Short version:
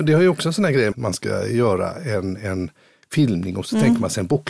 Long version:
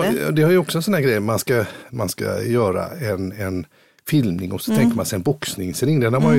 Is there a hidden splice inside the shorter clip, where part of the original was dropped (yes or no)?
yes